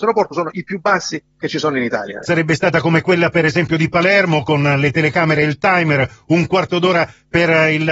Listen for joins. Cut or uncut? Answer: cut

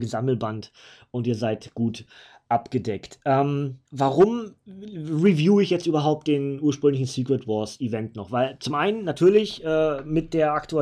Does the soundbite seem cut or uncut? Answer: cut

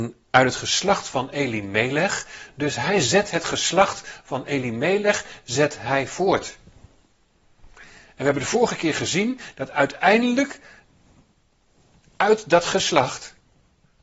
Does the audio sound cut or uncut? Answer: uncut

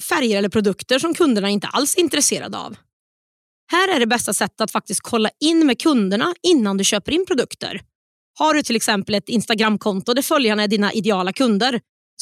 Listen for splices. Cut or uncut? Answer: uncut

